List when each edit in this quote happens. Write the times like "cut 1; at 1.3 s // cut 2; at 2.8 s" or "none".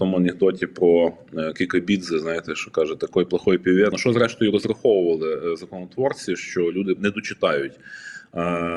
cut 1; at 3.9 s // cut 2; at 7.0 s